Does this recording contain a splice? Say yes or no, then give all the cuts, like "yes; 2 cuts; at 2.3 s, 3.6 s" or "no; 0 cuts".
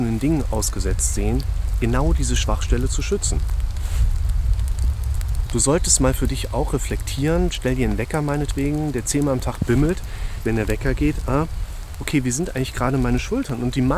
yes; 2 cuts; at 5.5 s, 10.4 s